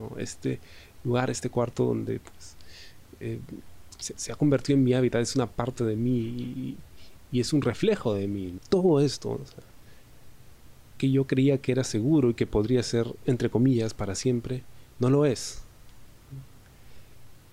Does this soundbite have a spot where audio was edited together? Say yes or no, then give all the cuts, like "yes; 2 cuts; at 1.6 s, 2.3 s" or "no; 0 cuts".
yes; 1 cut; at 8.6 s